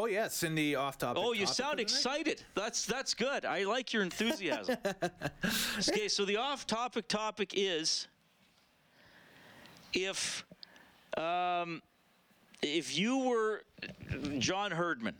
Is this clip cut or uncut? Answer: uncut